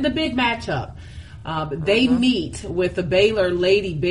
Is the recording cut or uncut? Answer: uncut